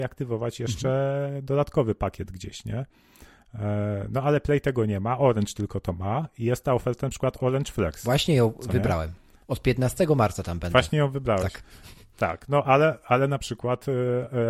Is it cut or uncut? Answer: uncut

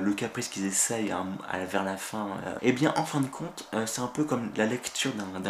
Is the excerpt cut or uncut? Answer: cut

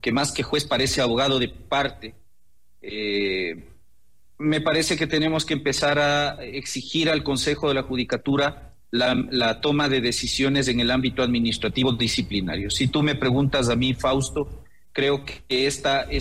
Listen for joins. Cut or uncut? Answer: uncut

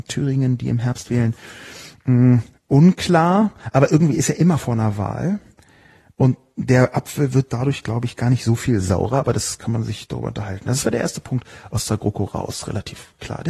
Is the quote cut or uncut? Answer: uncut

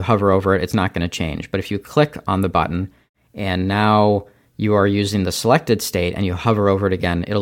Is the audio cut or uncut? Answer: uncut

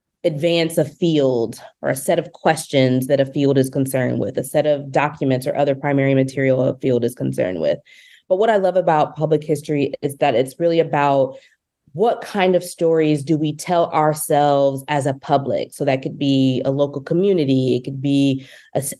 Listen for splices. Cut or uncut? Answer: uncut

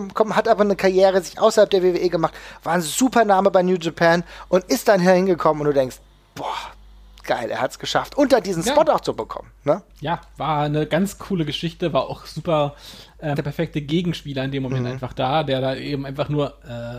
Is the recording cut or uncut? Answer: cut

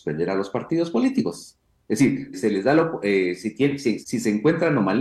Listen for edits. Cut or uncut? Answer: cut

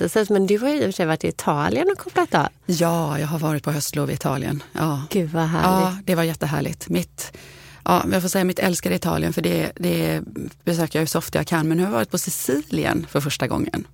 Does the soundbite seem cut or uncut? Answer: uncut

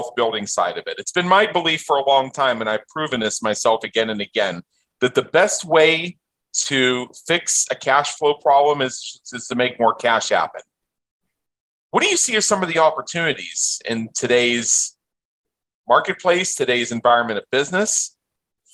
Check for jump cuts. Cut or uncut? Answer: uncut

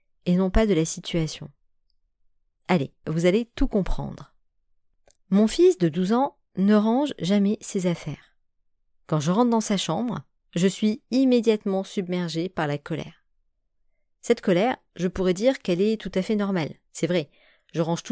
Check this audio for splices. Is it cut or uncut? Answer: cut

